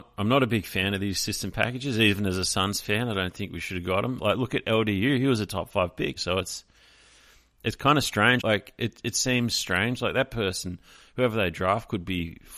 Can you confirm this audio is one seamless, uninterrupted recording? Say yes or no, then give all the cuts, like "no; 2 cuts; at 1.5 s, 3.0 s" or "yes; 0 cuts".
no; 3 cuts; at 4.2 s, 6.2 s, 8.4 s